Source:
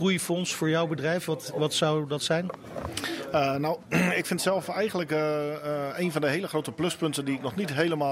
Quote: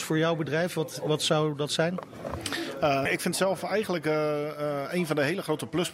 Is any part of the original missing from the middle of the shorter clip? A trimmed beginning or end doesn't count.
yes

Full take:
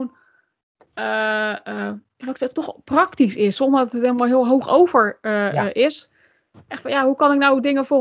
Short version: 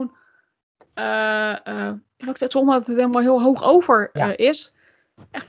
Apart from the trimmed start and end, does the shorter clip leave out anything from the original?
yes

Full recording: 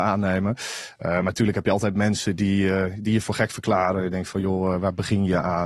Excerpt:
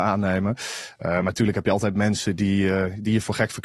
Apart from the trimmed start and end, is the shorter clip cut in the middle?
no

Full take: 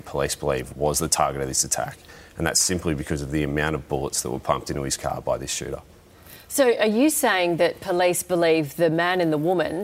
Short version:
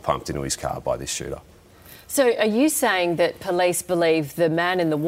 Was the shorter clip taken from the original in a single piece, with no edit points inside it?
yes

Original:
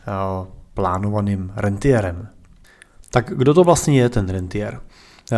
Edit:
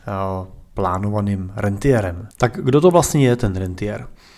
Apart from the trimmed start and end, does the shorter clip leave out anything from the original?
yes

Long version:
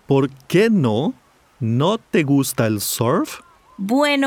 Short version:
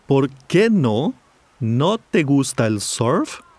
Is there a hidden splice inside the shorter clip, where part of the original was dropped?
no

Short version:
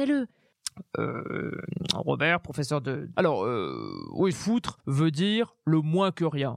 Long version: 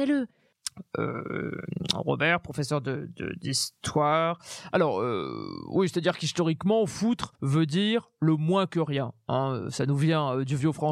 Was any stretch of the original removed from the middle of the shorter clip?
yes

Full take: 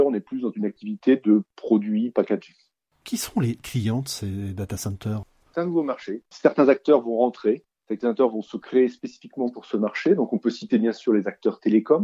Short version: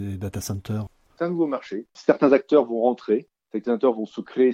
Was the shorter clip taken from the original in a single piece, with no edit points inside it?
yes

